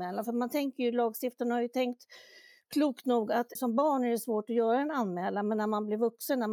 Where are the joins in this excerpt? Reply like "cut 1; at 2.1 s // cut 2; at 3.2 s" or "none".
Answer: cut 1; at 3.6 s